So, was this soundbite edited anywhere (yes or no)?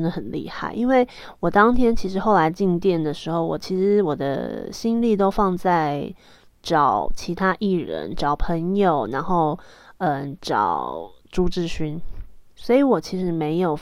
no